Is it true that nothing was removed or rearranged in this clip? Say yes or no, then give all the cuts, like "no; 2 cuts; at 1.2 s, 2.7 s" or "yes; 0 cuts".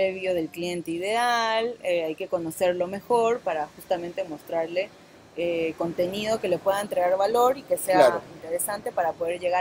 yes; 0 cuts